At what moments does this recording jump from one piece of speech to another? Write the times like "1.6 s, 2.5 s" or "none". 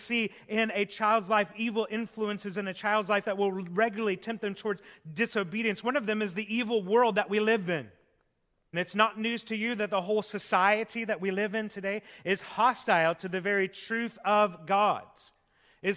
8.7 s